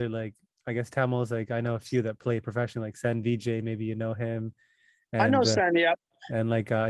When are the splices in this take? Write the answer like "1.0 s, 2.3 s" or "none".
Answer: none